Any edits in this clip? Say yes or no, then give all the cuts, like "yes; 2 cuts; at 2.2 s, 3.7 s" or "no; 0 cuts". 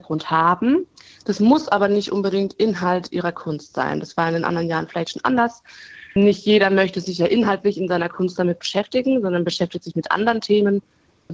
no; 0 cuts